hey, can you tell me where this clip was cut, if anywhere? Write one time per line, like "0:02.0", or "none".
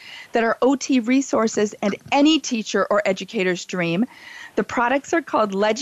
none